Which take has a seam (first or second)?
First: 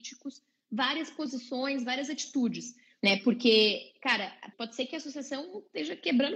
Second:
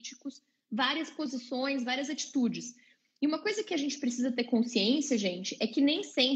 first